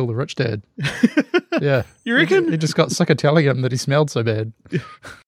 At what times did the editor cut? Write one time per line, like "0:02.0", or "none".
none